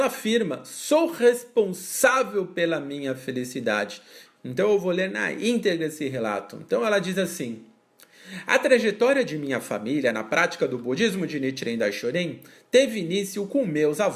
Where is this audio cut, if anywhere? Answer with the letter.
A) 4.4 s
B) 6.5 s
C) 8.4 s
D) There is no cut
A